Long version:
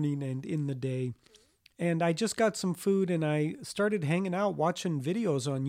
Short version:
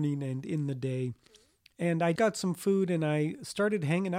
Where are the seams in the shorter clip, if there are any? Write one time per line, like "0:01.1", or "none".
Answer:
0:02.2